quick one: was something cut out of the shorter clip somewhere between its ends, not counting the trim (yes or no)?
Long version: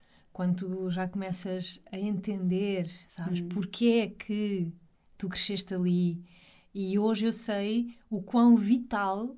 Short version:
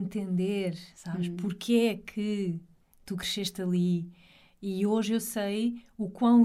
no